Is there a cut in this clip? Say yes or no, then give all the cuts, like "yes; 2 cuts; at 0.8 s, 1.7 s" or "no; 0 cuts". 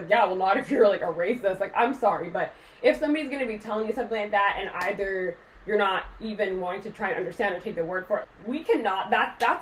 yes; 1 cut; at 8.2 s